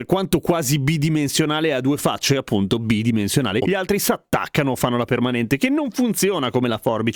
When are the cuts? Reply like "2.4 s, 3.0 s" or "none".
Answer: 3.7 s